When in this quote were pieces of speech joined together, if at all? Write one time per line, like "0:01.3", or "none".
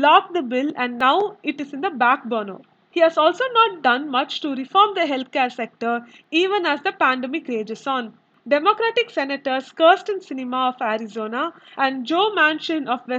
0:08.4

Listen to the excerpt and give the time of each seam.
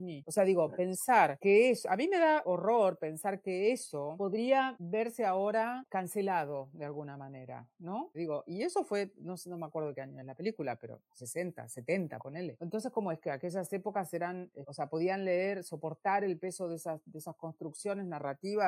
0:08.1

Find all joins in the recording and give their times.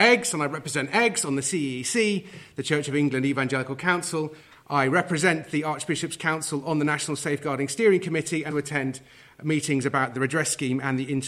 0:04.5
0:08.5

